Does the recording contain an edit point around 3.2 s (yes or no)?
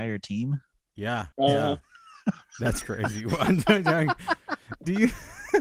no